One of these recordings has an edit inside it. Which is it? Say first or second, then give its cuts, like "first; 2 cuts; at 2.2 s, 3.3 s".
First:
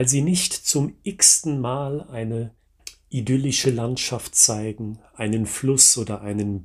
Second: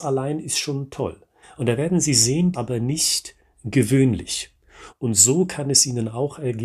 second; 3 cuts; at 1.4 s, 2.5 s, 4.9 s